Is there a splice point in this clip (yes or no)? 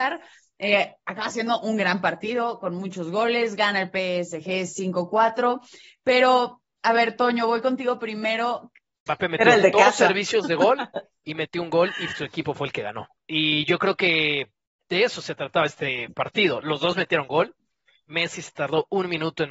yes